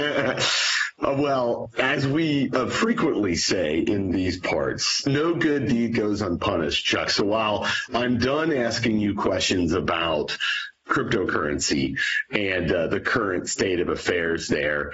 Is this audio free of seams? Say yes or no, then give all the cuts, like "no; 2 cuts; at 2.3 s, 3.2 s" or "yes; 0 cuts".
yes; 0 cuts